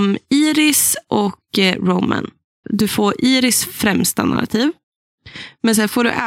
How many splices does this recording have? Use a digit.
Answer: 1